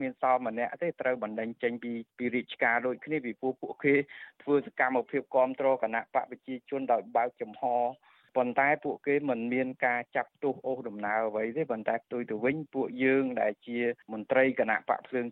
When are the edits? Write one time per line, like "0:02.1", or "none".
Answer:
none